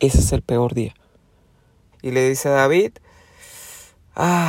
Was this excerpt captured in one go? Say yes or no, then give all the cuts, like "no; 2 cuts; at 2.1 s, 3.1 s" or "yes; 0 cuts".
no; 1 cut; at 1.9 s